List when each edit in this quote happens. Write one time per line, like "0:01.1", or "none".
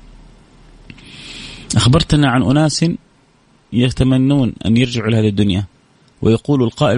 none